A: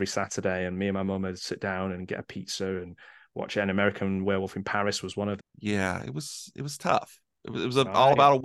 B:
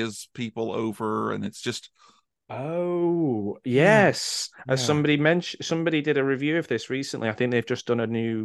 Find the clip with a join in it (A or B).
A